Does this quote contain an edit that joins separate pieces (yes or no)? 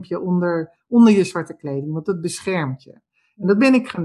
no